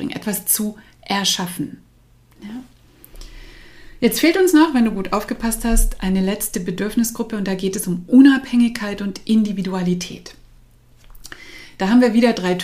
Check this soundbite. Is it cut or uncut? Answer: uncut